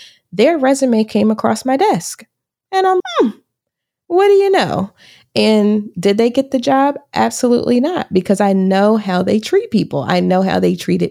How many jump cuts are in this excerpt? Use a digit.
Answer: 1